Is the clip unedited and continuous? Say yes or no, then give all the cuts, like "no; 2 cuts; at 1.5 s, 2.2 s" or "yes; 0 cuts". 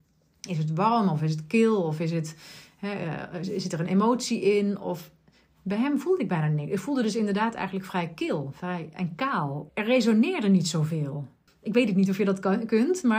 no; 2 cuts; at 9.7 s, 11.5 s